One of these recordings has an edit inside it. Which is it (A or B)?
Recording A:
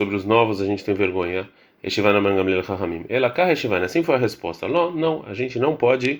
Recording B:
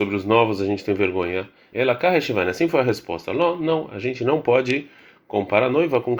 B